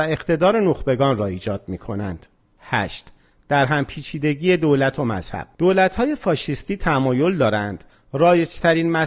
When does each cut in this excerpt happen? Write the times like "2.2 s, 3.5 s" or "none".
2.5 s, 5.5 s